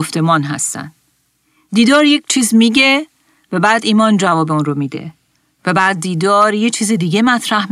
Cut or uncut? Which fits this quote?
uncut